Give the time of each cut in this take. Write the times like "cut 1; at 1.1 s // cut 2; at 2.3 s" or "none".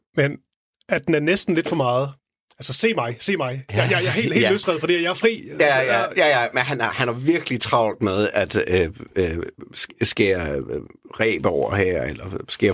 none